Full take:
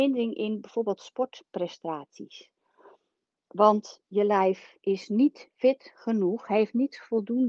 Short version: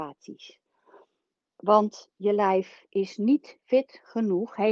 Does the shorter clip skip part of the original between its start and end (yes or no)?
no